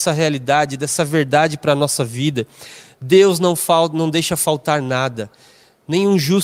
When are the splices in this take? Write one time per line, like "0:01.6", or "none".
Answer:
none